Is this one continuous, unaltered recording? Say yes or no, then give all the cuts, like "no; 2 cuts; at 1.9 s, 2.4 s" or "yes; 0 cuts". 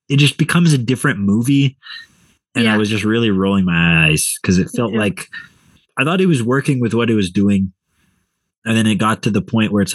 yes; 0 cuts